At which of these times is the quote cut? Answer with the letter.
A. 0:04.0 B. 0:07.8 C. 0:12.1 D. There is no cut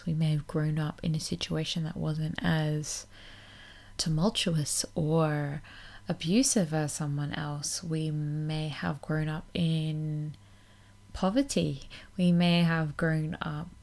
A